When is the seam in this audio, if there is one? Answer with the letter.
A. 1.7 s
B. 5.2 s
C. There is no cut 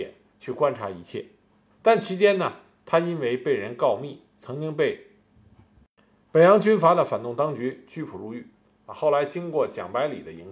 A